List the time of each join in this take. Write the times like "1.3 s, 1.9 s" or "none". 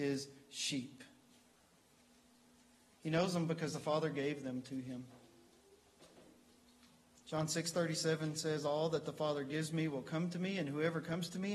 2.9 s